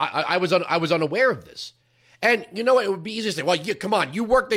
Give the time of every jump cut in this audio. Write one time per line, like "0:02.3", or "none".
none